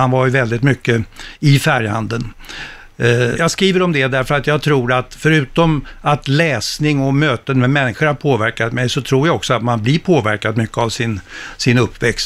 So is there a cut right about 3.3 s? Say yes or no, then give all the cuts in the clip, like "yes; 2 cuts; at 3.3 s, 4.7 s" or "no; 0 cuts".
yes; 1 cut; at 3.3 s